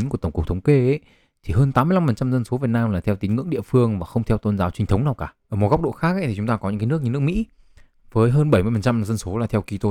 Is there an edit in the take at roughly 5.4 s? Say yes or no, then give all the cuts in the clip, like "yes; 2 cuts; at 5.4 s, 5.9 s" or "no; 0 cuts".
yes; 1 cut; at 5.4 s